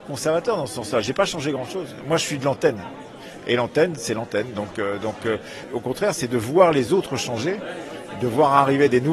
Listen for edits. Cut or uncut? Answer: uncut